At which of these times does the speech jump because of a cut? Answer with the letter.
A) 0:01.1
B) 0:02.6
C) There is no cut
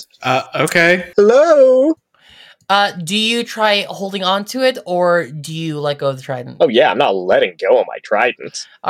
A